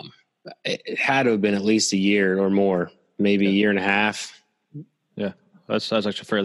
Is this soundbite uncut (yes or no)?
yes